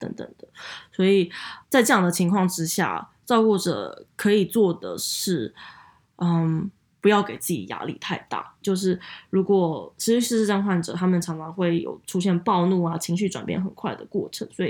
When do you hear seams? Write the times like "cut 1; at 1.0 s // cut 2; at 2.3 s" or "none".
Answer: cut 1; at 1.6 s // cut 2; at 8.6 s